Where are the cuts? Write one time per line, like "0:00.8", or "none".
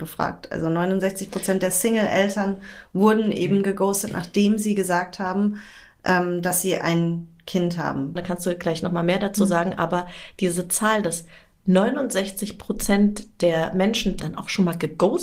0:08.2
0:14.2